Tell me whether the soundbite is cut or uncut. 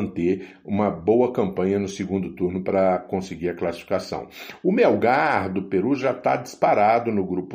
uncut